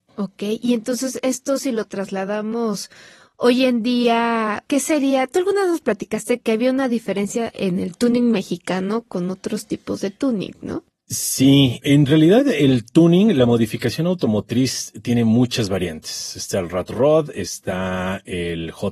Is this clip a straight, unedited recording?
yes; 0 cuts

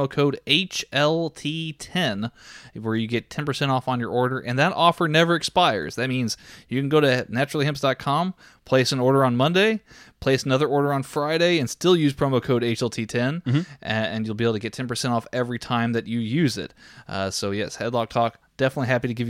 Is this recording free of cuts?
yes; 0 cuts

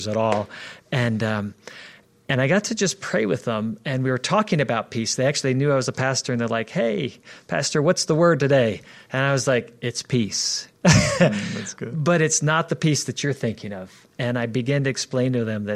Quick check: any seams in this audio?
no; 0 cuts

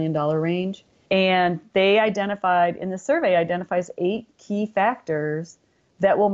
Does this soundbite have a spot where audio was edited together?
yes; 1 cut; at 1.0 s

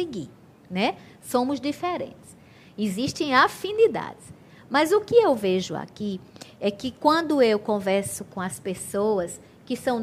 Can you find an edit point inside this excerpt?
no; 0 cuts

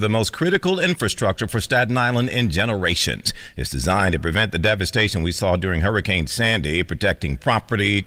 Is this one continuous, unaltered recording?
yes; 0 cuts

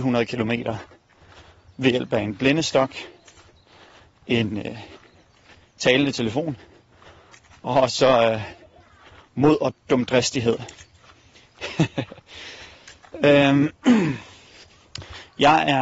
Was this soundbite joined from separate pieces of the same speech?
no; 0 cuts

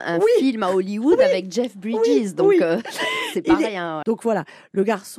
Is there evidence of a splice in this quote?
yes; 1 cut; at 4.0 s

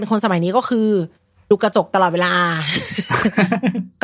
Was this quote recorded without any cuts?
yes; 0 cuts

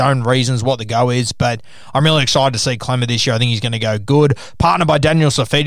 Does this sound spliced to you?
no; 0 cuts

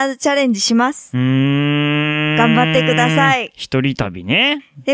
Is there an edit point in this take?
no; 0 cuts

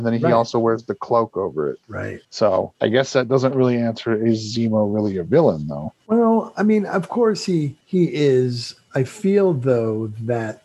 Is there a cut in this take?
no; 0 cuts

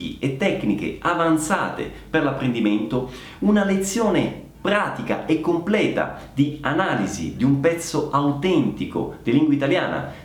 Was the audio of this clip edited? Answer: no; 0 cuts

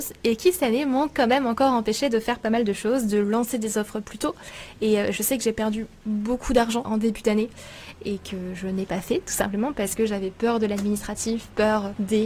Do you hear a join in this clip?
yes; 1 cut; at 6.8 s

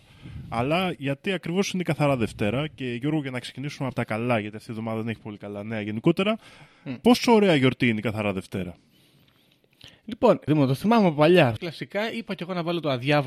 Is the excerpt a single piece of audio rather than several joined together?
no; 2 cuts; at 10.5 s, 11.6 s

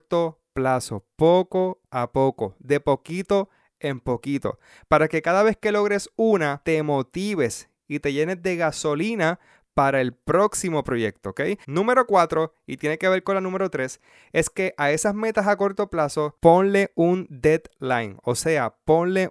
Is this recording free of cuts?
no; 1 cut; at 11.6 s

